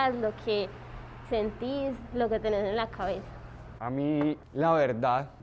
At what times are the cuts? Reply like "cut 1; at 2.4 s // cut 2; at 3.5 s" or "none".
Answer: cut 1; at 3.8 s